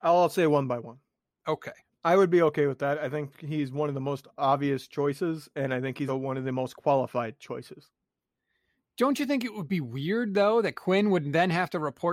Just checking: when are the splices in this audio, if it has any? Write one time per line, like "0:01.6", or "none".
0:01.9
0:06.1

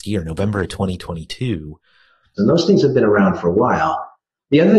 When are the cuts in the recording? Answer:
0:02.4

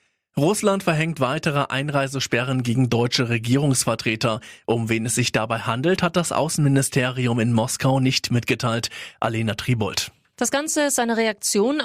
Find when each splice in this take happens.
none

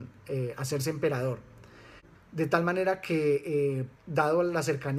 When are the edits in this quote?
0:02.2
0:04.0

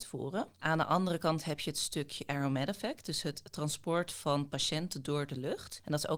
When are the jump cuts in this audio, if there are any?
none

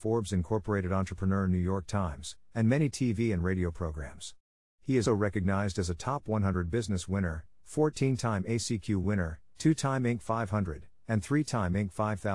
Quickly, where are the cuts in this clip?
0:05.1

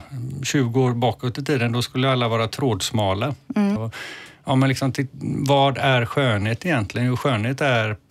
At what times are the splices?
0:03.8

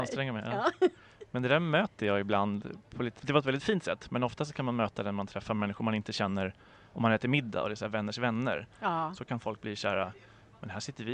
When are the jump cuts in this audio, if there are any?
0:03.2

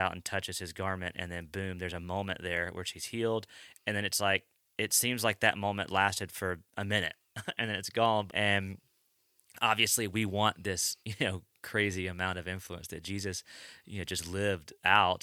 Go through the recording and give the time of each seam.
0:06.7
0:08.3
0:11.0

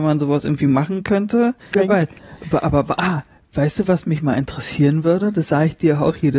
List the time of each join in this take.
0:01.7

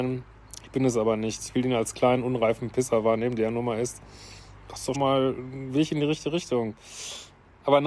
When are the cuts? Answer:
0:04.9

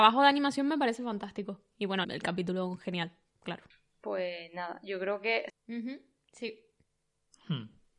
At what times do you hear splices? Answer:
0:02.0
0:05.5

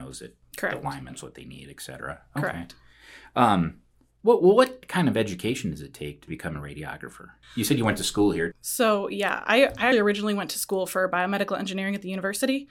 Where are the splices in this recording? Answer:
0:08.5
0:09.9

